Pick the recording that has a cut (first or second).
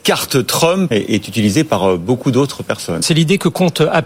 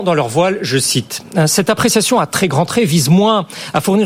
first